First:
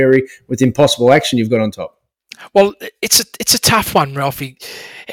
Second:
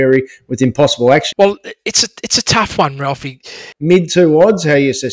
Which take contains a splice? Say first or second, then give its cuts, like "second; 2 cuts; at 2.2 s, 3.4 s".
second; 2 cuts; at 1.3 s, 3.7 s